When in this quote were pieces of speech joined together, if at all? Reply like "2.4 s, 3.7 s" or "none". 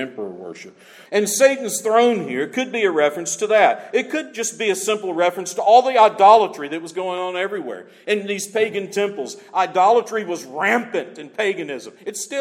1.1 s